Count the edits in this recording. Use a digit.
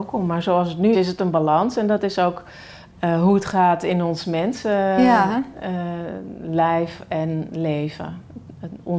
1